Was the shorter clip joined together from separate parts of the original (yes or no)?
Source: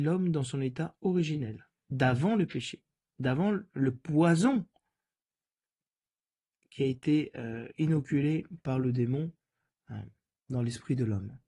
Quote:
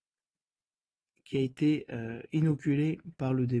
no